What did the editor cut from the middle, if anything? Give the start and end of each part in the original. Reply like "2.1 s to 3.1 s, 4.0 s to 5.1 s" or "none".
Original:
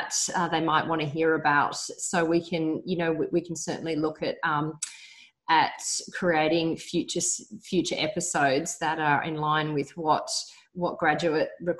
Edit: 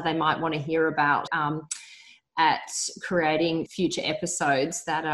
1.7 s to 4.4 s, 6.8 s to 7.6 s